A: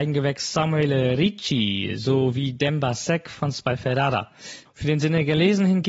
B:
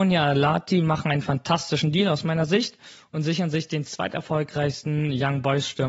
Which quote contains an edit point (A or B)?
A